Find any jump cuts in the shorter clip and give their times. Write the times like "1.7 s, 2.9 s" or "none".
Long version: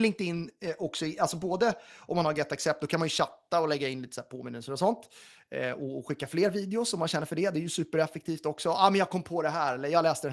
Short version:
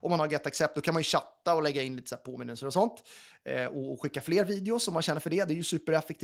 none